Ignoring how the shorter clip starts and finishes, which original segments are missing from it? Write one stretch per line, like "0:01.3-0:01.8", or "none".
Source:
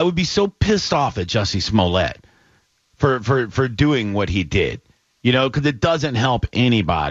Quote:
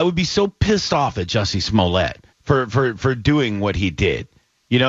0:02.3-0:02.8